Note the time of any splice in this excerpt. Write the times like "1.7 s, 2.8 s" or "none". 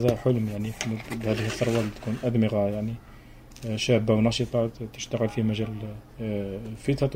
6.1 s